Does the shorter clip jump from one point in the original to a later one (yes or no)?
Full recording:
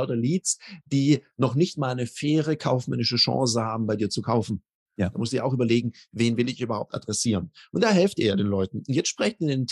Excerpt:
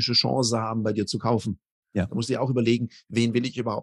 no